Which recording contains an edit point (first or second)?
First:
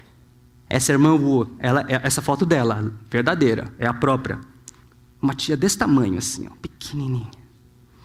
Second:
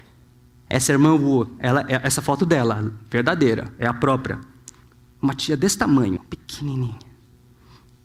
second